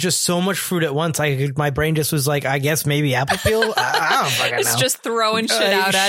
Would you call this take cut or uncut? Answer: uncut